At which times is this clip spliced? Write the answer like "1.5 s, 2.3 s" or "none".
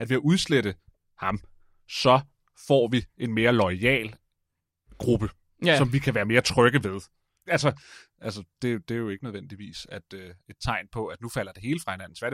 7.5 s